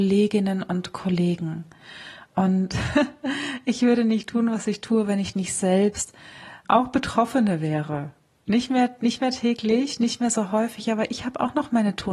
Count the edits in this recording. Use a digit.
1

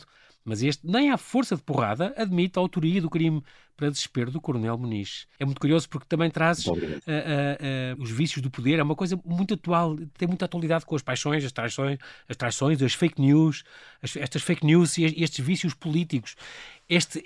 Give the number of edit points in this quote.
2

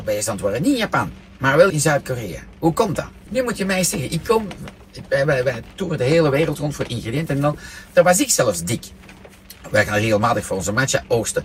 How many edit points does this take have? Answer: 3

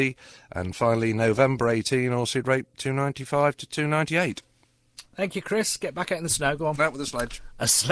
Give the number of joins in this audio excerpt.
1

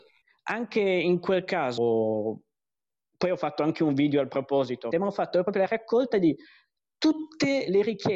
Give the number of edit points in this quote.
2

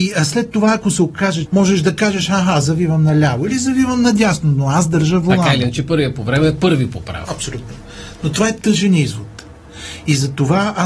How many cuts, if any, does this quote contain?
1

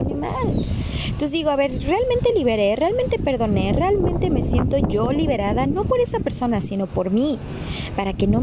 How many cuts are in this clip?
0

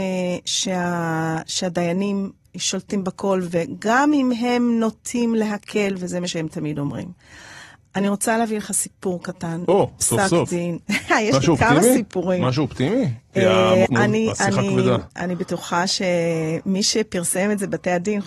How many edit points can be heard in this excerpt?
1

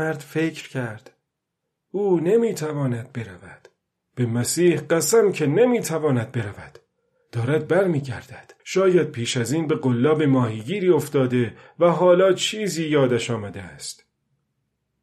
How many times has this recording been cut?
1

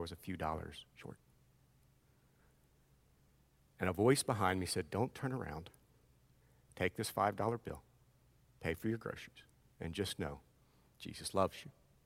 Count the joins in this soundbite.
0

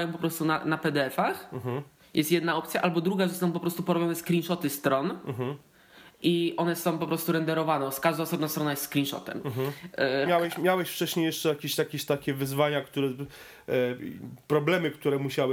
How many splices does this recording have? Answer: 1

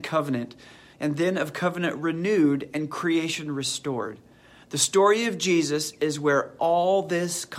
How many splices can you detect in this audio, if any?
1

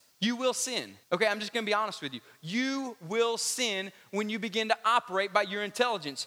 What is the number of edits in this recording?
0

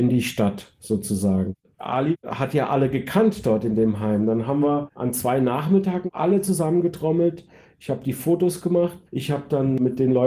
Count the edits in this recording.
1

